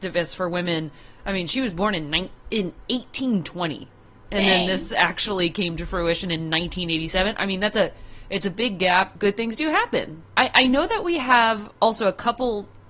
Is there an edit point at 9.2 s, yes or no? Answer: yes